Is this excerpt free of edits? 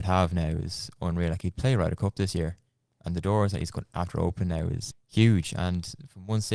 no; 1 cut; at 4.9 s

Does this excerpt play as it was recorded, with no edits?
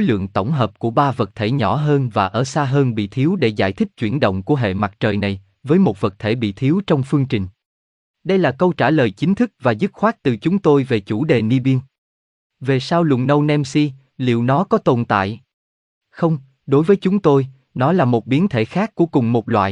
yes; 0 cuts

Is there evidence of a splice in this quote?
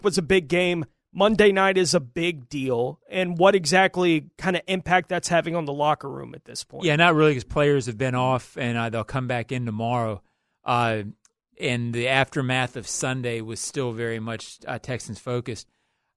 no; 0 cuts

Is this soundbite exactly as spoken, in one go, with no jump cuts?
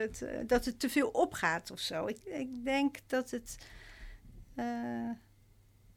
no; 1 cut; at 2.2 s

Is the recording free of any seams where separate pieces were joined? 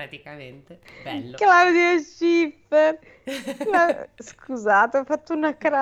yes; 0 cuts

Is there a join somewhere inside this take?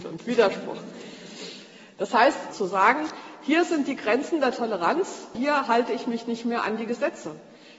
yes; 2 cuts; at 2.5 s, 5.3 s

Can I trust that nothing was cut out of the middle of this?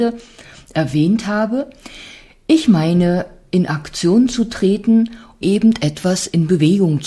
no; 1 cut; at 5.4 s

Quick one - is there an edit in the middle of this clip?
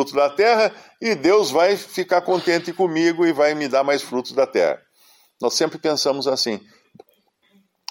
no; 0 cuts

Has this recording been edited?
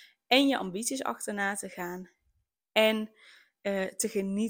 no; 0 cuts

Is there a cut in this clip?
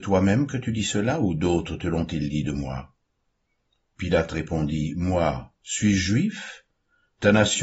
no; 0 cuts

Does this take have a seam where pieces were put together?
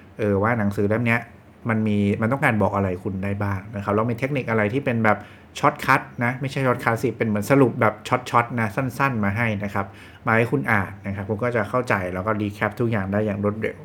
no; 0 cuts

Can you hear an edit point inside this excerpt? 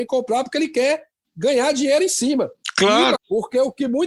yes; 1 cut; at 3.1 s

